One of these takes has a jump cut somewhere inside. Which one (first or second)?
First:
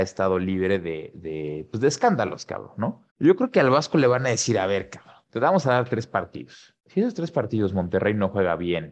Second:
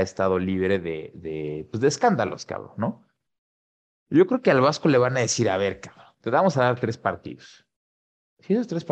first